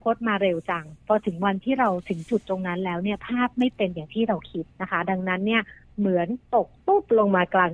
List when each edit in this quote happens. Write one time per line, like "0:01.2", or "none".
0:04.7